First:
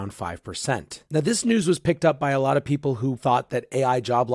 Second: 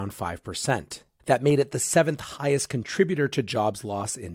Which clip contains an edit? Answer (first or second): first